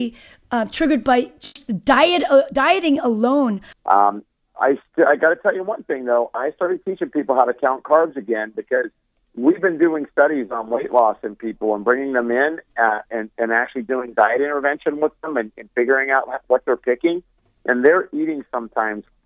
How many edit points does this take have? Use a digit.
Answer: 1